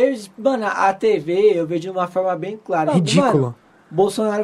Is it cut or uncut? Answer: cut